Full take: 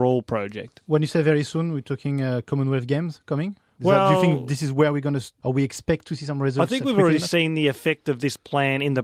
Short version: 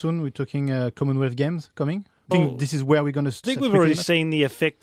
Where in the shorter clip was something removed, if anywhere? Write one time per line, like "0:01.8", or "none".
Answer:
0:02.3
0:03.4